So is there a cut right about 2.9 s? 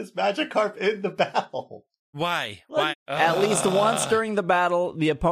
yes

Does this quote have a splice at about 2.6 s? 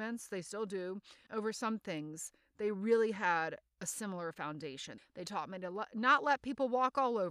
no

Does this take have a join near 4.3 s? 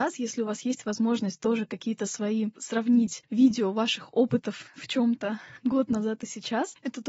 no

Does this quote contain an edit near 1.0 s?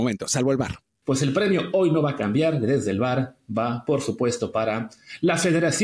yes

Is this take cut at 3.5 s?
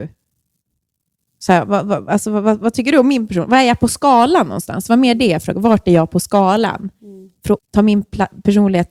no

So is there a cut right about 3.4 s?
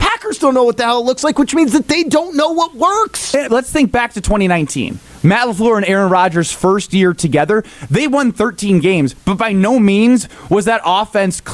yes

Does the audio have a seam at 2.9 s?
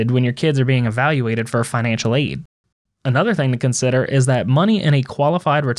yes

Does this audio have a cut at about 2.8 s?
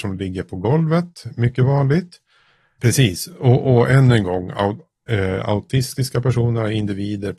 yes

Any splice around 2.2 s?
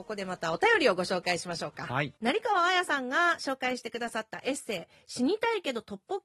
yes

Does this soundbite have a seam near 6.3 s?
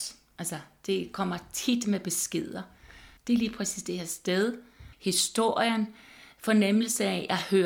no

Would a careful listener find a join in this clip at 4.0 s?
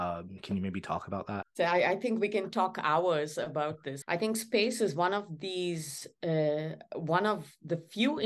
yes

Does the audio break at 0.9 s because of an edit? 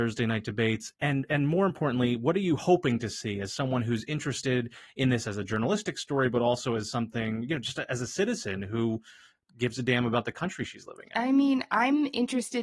yes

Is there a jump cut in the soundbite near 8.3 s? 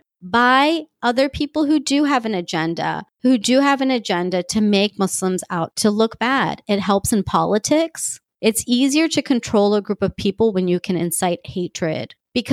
yes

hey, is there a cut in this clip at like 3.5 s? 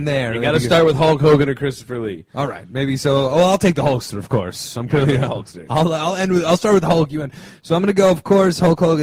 no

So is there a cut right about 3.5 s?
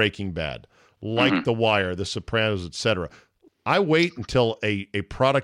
yes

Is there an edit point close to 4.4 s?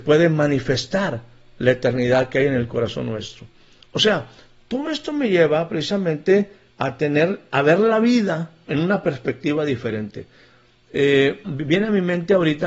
no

